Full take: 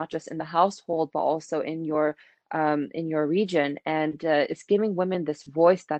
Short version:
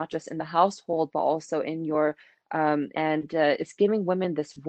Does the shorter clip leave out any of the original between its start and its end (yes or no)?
yes